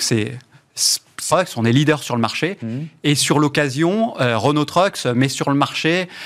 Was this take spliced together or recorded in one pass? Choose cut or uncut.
cut